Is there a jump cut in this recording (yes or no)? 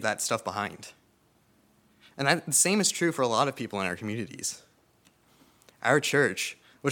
no